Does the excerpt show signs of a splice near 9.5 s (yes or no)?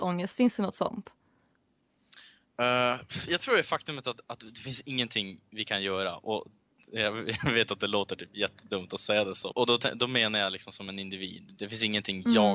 yes